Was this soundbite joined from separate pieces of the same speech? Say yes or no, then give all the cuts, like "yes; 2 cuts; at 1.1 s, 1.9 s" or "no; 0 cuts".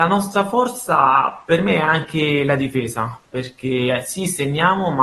no; 0 cuts